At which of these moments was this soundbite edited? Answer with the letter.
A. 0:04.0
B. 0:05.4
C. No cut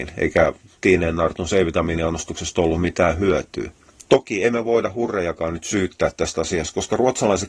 A